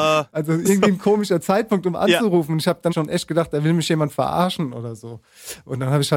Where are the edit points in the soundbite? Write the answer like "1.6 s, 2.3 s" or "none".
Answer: 2.9 s